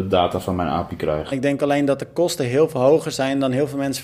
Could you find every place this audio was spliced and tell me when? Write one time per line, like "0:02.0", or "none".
0:01.3